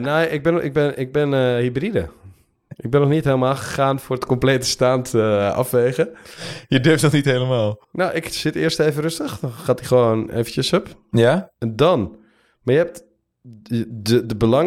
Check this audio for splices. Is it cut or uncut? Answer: cut